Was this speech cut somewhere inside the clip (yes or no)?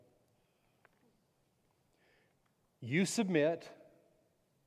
no